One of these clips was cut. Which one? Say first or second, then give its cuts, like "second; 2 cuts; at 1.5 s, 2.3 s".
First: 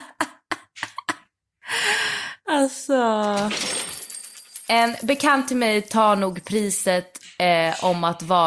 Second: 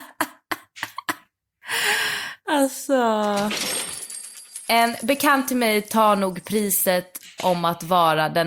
second; 1 cut; at 7.4 s